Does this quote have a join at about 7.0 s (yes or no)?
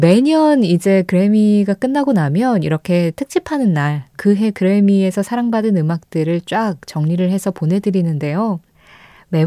no